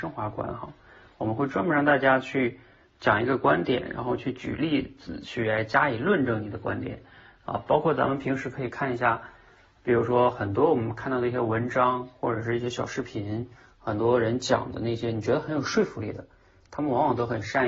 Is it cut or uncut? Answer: uncut